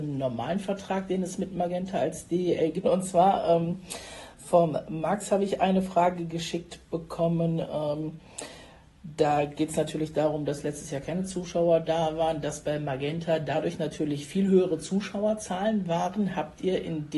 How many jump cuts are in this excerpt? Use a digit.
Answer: 1